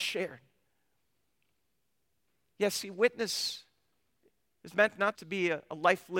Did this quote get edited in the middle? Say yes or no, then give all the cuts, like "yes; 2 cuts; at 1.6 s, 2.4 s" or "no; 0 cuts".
yes; 1 cut; at 5.1 s